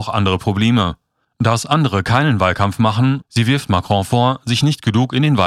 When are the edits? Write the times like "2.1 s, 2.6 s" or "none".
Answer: 1.2 s, 3.2 s